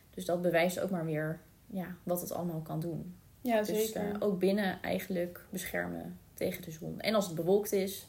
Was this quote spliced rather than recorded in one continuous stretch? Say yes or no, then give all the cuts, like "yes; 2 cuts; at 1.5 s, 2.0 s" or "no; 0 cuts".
no; 0 cuts